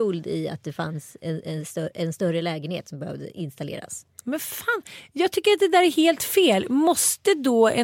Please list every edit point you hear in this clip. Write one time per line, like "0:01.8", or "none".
none